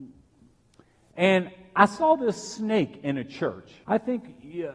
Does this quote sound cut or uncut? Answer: cut